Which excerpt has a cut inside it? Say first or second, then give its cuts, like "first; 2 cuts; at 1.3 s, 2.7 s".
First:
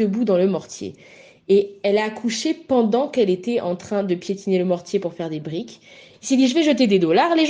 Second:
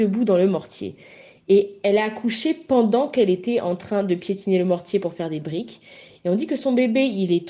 first; 1 cut; at 6.1 s